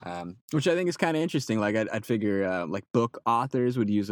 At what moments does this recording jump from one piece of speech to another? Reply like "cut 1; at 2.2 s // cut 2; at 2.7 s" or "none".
none